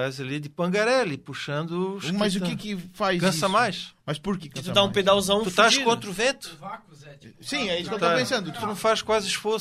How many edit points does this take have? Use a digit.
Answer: 2